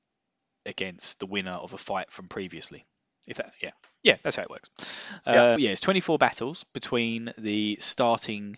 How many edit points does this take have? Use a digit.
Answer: 1